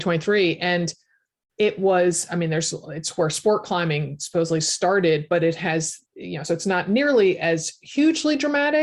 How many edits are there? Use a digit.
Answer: 0